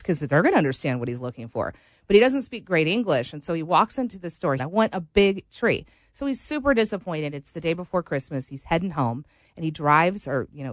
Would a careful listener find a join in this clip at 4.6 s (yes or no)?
yes